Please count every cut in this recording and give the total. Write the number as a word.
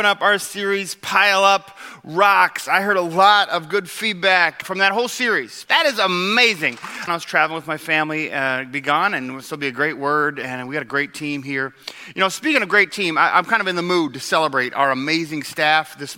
three